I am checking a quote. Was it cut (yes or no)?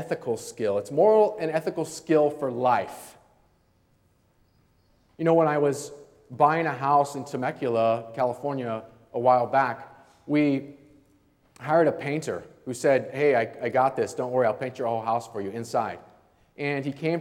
no